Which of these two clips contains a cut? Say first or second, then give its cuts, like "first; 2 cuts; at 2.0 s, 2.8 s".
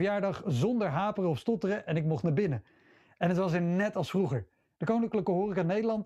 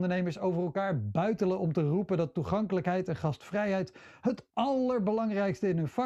first; 1 cut; at 4.7 s